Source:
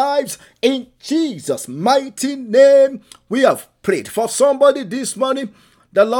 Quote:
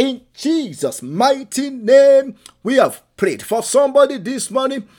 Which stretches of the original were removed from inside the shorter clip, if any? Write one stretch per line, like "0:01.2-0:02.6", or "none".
none